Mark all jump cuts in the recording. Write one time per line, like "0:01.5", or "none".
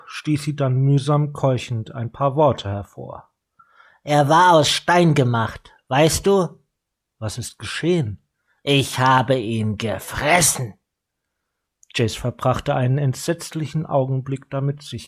none